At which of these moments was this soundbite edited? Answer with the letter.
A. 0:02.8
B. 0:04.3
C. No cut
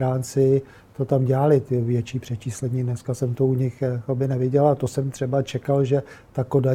C